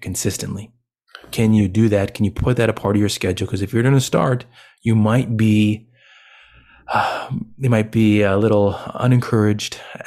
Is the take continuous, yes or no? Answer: yes